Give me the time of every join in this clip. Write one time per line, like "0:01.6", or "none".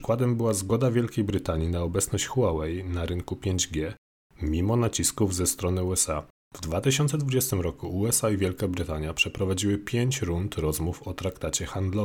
0:06.4